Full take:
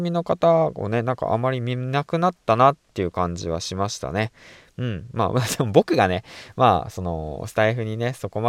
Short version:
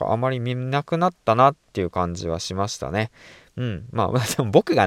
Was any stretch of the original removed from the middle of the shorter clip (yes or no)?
no